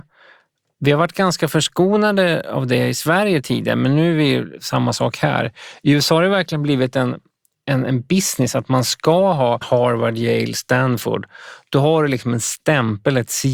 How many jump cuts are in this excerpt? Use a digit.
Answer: 1